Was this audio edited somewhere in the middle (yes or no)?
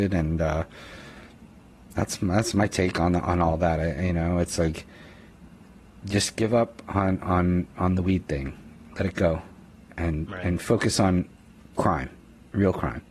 no